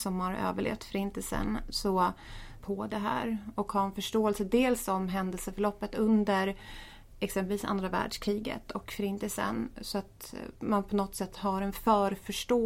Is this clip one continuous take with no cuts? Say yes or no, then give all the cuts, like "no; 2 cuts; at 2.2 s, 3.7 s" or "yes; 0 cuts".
no; 1 cut; at 2.6 s